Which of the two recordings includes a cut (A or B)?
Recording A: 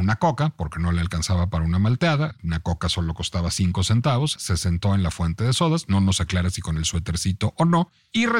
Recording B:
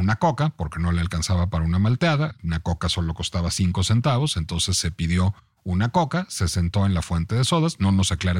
A